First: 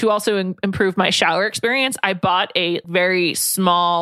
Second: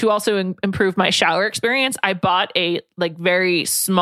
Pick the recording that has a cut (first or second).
first